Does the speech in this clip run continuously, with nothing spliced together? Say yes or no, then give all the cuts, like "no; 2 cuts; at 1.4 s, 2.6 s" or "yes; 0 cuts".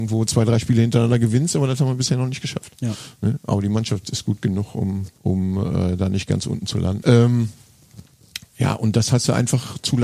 no; 2 cuts; at 5.2 s, 7.0 s